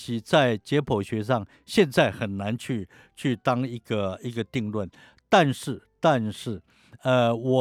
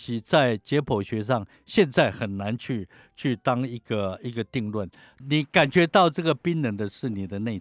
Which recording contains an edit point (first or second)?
second